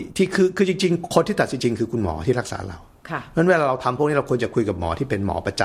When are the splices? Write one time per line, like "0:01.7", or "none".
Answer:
0:01.6